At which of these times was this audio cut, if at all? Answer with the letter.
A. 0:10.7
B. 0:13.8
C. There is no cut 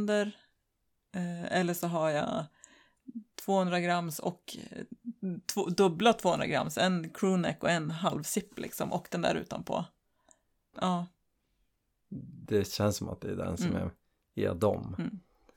A